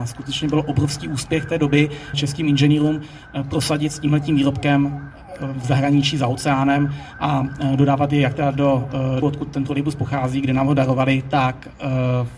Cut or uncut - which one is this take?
cut